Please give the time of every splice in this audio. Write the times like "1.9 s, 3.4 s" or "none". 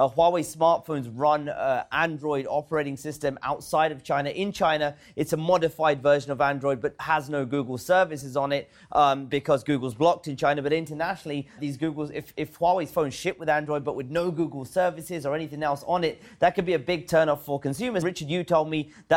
11.6 s, 18.0 s